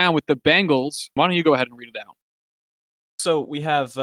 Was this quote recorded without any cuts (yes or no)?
no